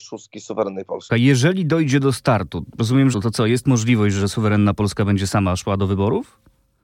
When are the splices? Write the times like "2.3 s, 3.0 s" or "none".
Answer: 1.1 s, 3.1 s